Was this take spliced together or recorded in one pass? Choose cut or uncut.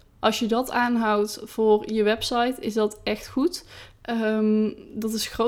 uncut